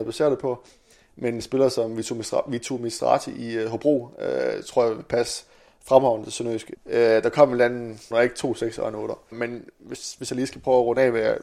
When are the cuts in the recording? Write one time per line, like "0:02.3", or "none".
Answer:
0:06.7
0:08.1
0:09.3